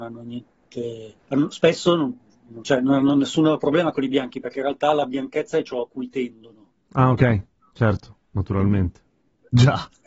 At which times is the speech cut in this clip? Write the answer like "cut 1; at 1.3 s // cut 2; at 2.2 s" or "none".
cut 1; at 1.2 s // cut 2; at 2.6 s